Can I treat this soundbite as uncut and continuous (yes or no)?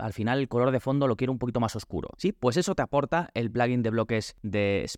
no